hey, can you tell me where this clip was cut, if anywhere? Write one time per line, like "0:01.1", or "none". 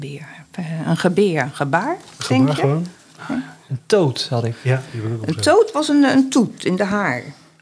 none